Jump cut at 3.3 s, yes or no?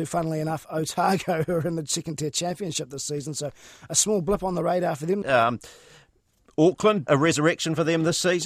no